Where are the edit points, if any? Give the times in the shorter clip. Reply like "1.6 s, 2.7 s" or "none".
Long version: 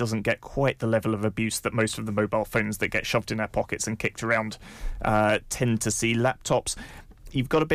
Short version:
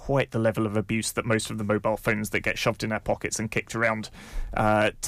none